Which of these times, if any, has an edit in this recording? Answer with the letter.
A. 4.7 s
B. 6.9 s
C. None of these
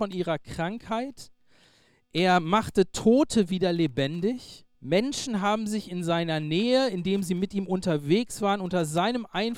A